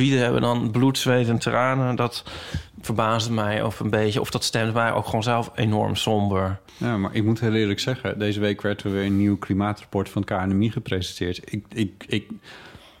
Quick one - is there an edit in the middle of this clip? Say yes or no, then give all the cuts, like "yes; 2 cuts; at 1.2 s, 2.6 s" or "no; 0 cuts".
yes; 1 cut; at 6.7 s